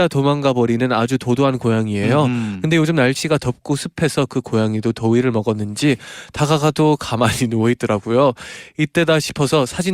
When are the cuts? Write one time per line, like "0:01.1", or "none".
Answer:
none